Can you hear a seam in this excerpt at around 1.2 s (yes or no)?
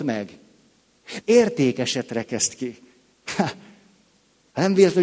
yes